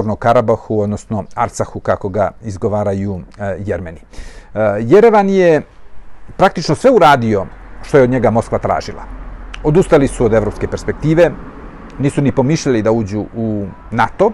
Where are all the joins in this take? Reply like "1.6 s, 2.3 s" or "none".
none